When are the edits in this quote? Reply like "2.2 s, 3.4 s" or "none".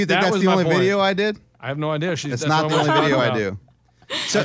none

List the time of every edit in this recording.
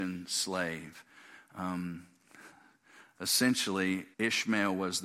4.1 s

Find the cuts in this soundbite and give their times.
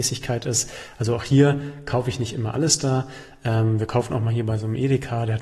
none

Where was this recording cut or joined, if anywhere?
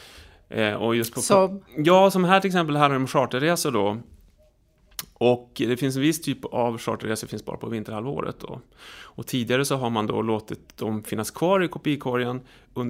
1.7 s

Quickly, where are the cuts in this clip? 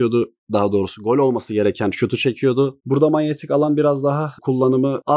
2.8 s

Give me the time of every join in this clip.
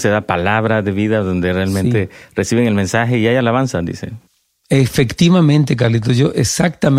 none

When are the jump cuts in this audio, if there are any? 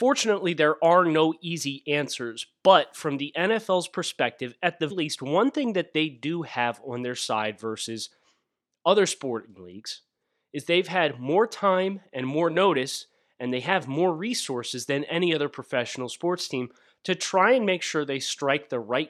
4.9 s

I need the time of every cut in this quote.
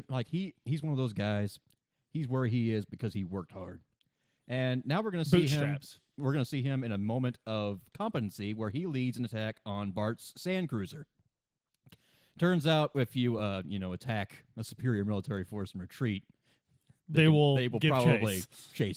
none

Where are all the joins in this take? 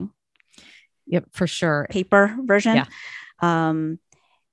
1.9 s, 3.4 s

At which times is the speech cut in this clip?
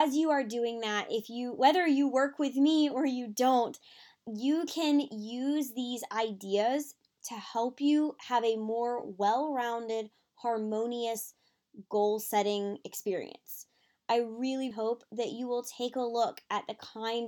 14.7 s

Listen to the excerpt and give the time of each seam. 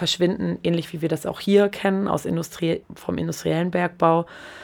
2.8 s

